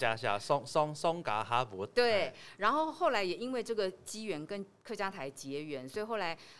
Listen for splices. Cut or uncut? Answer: uncut